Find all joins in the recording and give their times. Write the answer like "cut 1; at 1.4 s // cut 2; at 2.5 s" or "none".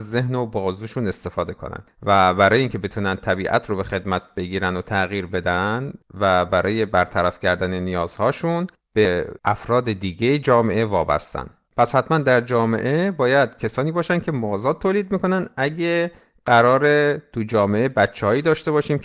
none